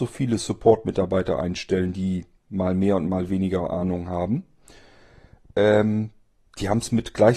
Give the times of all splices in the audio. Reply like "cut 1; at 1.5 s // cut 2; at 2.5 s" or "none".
none